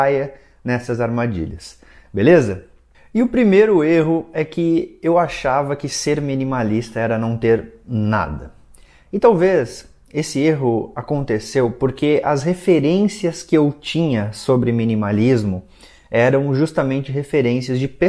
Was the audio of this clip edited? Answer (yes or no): no